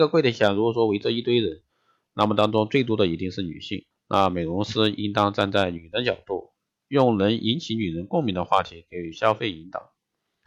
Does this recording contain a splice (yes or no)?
yes